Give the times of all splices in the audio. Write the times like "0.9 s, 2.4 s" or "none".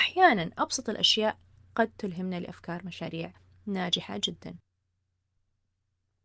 none